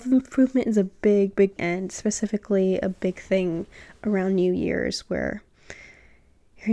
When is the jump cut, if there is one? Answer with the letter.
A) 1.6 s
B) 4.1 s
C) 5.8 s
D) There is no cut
A